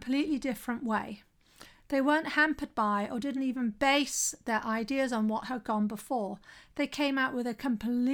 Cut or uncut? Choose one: uncut